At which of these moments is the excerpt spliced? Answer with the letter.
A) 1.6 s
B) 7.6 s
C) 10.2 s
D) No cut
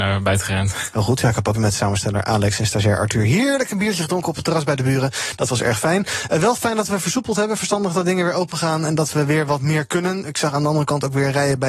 A